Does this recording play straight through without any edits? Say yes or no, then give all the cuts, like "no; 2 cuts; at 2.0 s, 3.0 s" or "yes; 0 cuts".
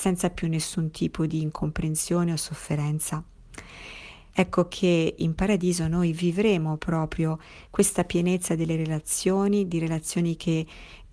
no; 1 cut; at 4.3 s